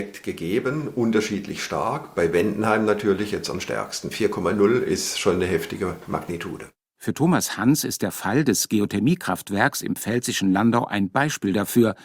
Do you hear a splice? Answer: no; 0 cuts

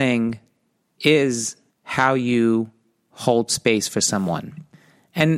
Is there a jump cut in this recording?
yes; 1 cut; at 1.7 s

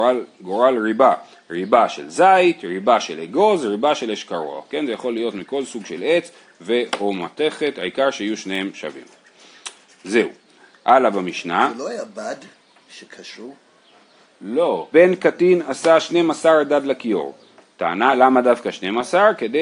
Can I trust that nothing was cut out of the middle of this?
no; 1 cut; at 14.9 s

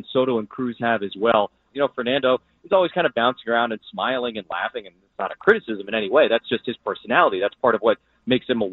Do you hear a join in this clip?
yes; 1 cut; at 1.7 s

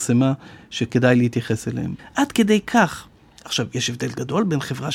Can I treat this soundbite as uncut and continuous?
no; 1 cut; at 2.0 s

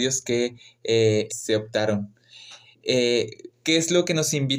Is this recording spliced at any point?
yes; 2 cuts; at 1.3 s, 3.5 s

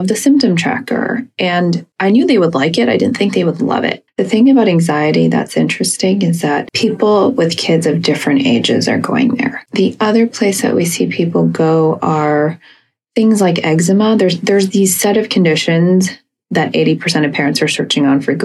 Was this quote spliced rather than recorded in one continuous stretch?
yes; 1 cut; at 4.1 s

